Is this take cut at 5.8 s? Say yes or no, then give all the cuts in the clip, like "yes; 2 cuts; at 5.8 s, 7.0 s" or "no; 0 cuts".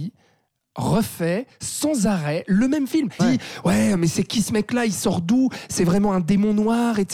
no; 1 cut; at 3.2 s